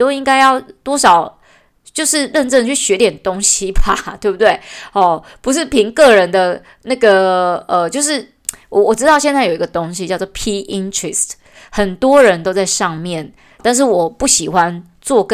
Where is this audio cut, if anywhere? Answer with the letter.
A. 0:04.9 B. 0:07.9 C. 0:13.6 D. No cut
C